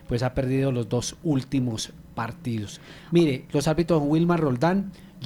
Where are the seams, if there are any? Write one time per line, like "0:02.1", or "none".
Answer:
0:03.5